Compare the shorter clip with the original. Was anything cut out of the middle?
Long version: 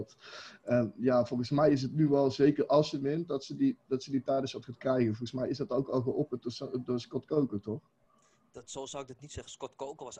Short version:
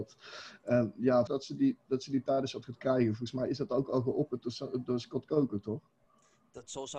yes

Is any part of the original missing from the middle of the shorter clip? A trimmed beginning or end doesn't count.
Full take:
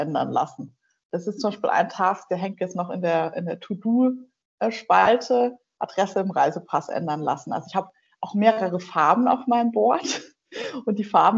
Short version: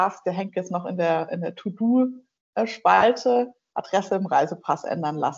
no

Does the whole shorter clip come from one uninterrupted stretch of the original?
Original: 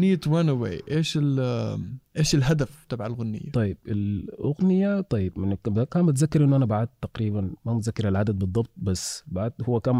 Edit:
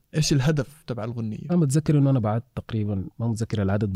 no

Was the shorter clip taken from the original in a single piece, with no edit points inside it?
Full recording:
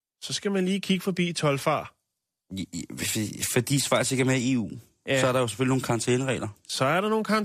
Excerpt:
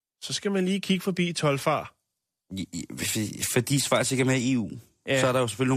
yes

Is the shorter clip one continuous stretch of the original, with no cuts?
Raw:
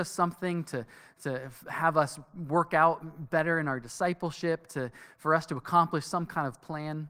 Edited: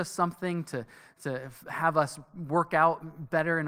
yes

